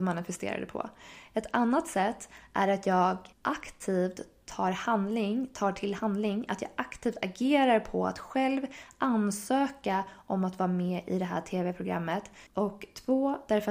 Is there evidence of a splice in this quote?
yes; 2 cuts; at 3.3 s, 12.5 s

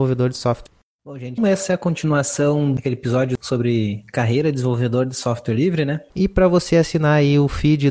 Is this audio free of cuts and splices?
no; 2 cuts; at 1.4 s, 6.1 s

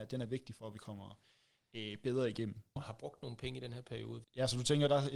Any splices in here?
yes; 2 cuts; at 2.8 s, 4.2 s

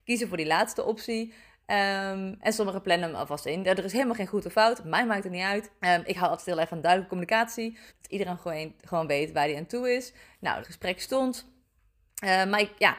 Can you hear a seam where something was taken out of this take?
yes; 3 cuts; at 5.8 s, 7.9 s, 10.6 s

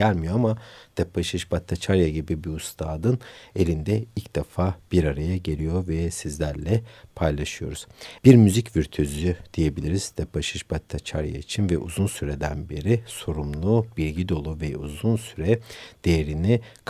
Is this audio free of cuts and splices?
no; 1 cut; at 8.2 s

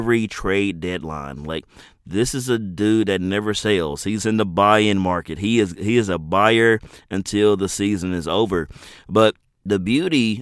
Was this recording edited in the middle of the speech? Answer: yes; 1 cut; at 4.2 s

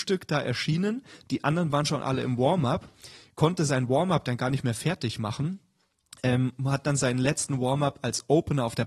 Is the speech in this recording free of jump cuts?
yes; 0 cuts

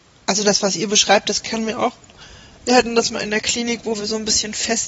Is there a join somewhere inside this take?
no; 0 cuts

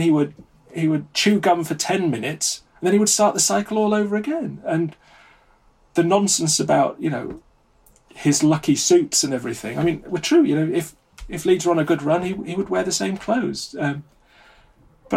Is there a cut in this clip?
no; 0 cuts

